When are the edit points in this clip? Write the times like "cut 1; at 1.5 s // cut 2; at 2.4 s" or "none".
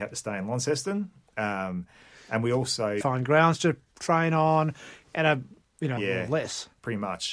cut 1; at 3.0 s // cut 2; at 6.0 s